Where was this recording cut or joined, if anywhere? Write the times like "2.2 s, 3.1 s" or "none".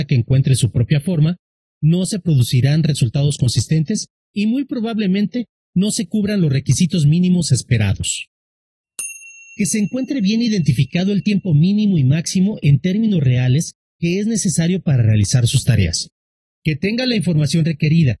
16.5 s